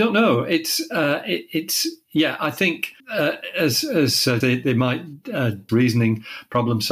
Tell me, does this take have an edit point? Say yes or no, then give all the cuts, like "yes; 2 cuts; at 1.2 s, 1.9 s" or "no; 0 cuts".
yes; 3 cuts; at 3.0 s, 4.4 s, 5.7 s